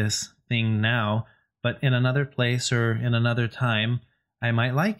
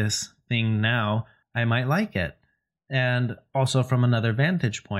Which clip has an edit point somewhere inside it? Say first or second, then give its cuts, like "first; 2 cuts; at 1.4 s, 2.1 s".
second; 1 cut; at 1.4 s